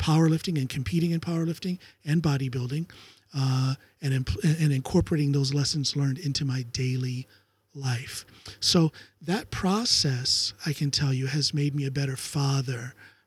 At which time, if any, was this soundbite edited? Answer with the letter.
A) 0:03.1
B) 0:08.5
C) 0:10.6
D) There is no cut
D